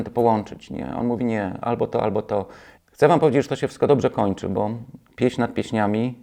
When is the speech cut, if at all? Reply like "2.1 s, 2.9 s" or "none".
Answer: 2.8 s